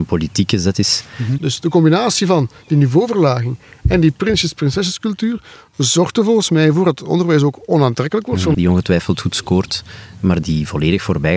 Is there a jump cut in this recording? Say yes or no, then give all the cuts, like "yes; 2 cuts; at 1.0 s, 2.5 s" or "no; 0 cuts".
yes; 3 cuts; at 1.4 s, 8.5 s, 10.4 s